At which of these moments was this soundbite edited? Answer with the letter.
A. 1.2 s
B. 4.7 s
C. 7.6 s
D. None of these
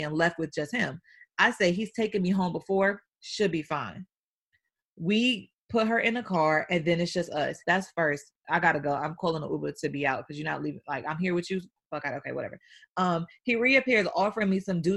C